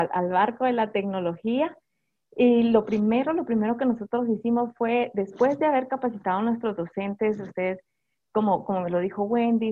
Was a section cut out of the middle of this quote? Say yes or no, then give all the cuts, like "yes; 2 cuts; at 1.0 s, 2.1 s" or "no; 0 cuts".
no; 0 cuts